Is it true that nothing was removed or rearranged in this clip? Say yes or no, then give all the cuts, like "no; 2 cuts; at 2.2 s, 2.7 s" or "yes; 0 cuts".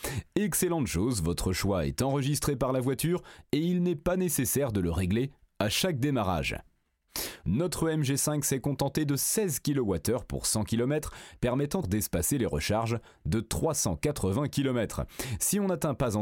no; 2 cuts; at 7.4 s, 11.8 s